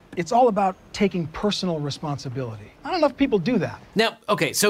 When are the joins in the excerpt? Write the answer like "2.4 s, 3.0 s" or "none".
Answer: 2.8 s

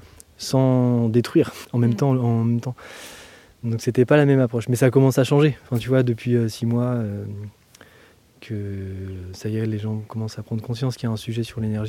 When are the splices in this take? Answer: 1.6 s

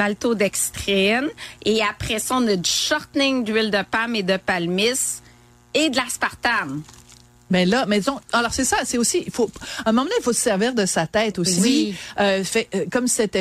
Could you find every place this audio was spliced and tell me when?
11.6 s

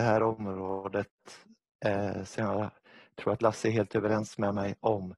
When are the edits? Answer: none

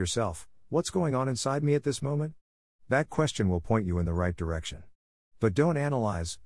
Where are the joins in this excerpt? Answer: none

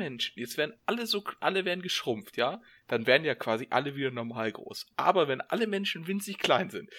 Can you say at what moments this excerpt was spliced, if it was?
none

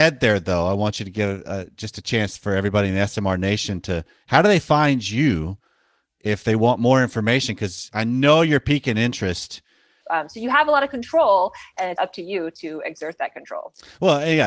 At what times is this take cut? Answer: 10.0 s, 12.0 s

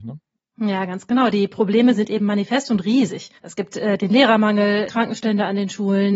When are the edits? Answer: 3.4 s, 4.9 s

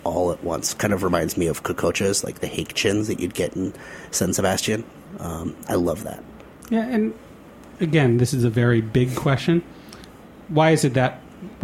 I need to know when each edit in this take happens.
none

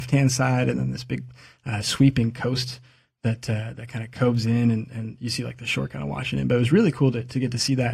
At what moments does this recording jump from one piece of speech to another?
none

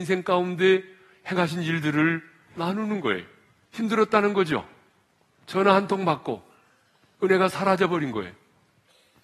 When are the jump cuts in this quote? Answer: 3.7 s

